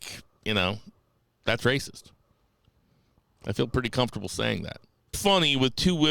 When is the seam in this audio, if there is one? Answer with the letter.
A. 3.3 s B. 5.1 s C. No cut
B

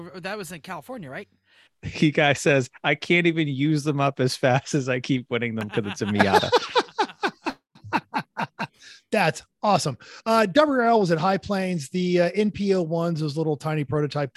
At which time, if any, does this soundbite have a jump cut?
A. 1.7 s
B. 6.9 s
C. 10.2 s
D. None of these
A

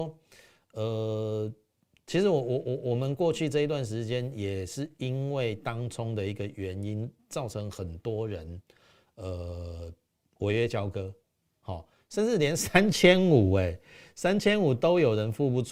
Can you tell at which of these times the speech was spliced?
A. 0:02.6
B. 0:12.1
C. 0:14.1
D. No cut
D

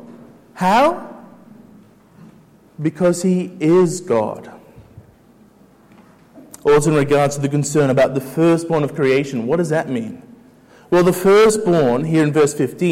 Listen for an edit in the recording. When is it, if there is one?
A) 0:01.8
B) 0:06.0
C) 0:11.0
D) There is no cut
D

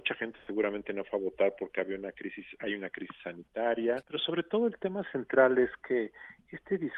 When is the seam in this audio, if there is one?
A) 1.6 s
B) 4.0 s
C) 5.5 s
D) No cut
B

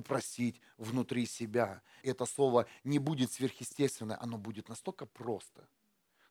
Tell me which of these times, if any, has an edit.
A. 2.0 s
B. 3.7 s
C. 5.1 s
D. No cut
A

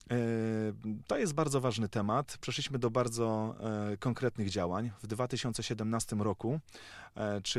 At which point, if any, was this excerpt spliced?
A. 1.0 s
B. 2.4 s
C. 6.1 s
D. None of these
D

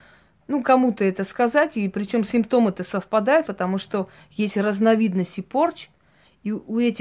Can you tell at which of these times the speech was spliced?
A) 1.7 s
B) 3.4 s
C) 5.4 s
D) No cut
B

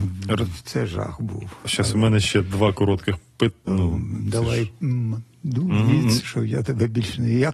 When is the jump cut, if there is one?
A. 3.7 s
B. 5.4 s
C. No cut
A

